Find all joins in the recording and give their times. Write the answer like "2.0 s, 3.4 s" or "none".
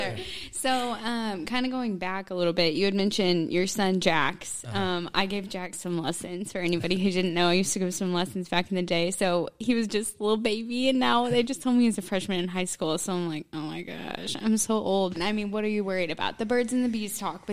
15.1 s